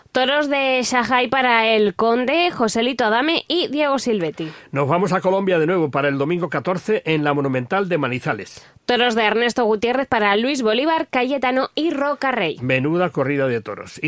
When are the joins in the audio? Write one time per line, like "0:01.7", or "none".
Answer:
none